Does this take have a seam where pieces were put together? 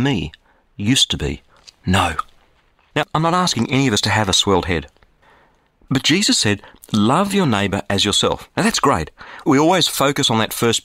no; 0 cuts

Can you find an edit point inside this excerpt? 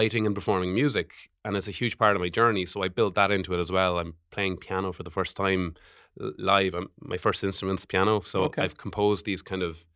no; 0 cuts

